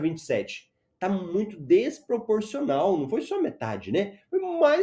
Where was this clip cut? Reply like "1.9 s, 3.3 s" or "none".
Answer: none